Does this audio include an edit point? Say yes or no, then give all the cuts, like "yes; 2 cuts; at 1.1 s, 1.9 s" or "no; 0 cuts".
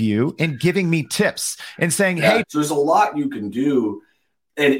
yes; 1 cut; at 2.4 s